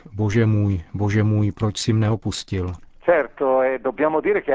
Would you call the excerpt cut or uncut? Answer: uncut